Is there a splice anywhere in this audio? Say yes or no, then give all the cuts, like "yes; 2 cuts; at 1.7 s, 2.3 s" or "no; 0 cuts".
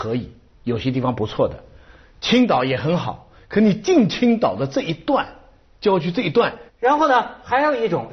yes; 1 cut; at 6.7 s